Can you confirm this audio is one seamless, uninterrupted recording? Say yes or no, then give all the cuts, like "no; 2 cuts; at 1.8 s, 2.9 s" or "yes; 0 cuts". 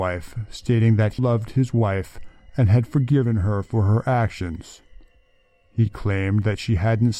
no; 1 cut; at 1.2 s